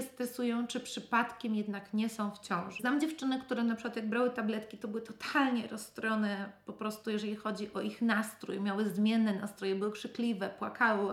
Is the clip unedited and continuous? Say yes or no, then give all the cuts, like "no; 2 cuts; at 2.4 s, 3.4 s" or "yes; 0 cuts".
no; 1 cut; at 2.8 s